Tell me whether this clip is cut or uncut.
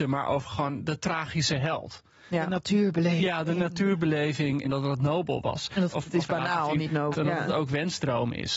cut